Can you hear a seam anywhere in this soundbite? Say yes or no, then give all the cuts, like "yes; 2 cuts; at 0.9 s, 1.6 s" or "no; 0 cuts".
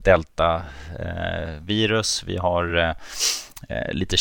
no; 0 cuts